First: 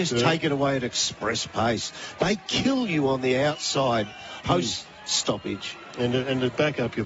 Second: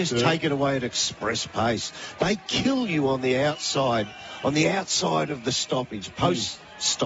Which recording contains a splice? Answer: first; 1 cut; at 4.4 s

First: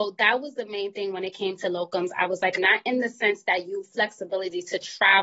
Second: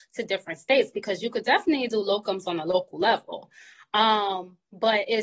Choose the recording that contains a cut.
first; 1 cut; at 2.6 s

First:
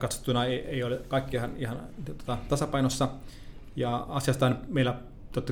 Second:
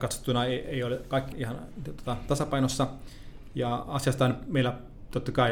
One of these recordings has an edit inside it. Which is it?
second; 1 cut; at 1.3 s

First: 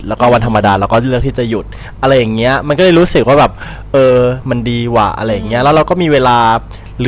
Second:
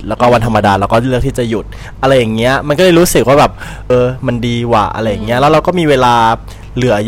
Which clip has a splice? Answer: second; 1 cut; at 3.9 s

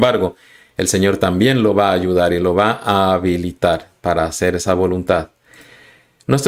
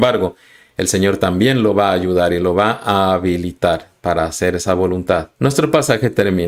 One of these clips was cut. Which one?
second; 1 cut; at 5.4 s

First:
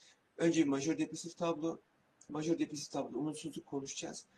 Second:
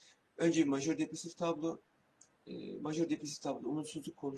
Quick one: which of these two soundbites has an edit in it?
first; 1 cut; at 2.3 s

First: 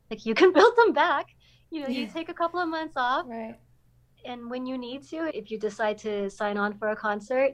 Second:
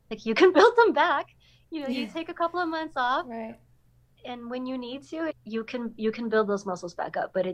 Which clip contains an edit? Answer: second; 1 cut; at 5.3 s

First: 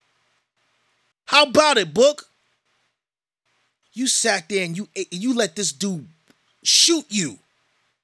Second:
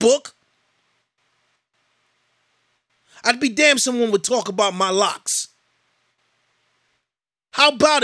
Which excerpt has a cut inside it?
first; 2 cuts; at 1.1 s, 3.9 s

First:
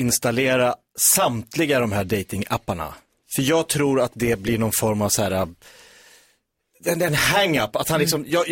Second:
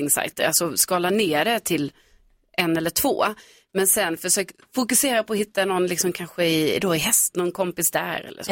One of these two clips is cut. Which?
second; 1 cut; at 7.3 s

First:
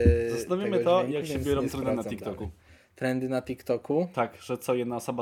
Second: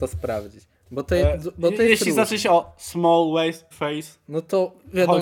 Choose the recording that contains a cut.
second; 1 cut; at 3.7 s

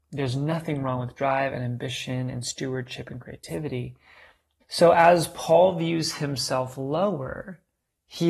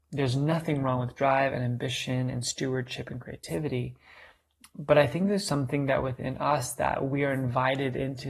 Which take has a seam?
first; 1 cut; at 4.6 s

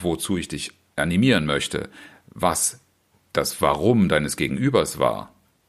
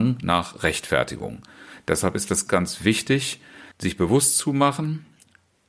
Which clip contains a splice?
second; 2 cuts; at 2.5 s, 3.7 s

